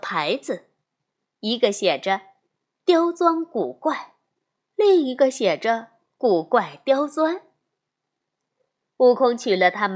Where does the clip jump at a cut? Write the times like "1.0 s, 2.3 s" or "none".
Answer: none